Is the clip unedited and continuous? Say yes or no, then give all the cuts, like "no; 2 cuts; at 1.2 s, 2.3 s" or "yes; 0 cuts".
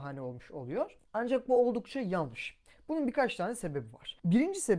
yes; 0 cuts